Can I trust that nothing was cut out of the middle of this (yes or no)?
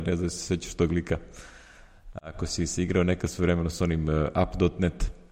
yes